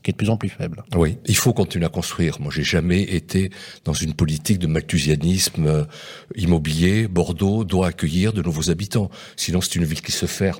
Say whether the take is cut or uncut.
uncut